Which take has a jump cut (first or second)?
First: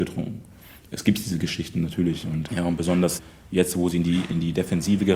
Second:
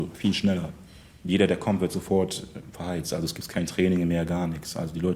first